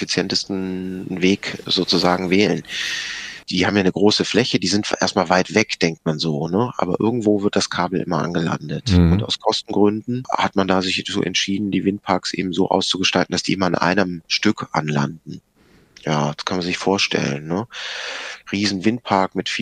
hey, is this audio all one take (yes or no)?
no